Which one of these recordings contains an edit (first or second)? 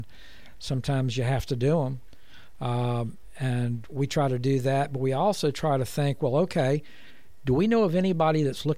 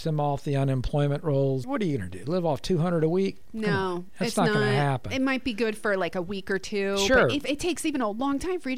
second